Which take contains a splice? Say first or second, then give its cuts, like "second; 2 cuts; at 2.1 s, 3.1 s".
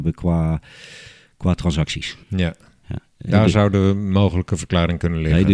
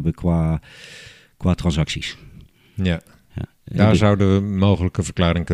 first; 1 cut; at 2.2 s